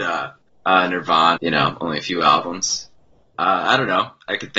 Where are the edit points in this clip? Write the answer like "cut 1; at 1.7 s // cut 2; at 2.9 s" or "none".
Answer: cut 1; at 1.4 s